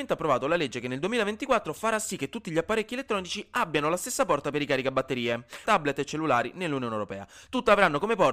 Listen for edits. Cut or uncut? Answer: cut